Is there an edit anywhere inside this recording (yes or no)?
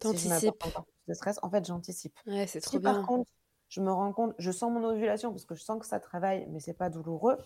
no